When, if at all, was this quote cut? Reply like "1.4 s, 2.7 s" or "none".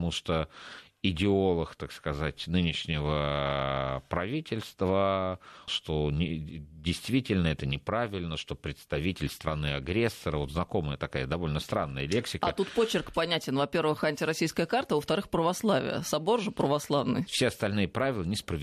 5.7 s, 17.3 s